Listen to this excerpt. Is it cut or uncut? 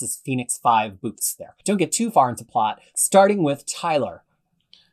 cut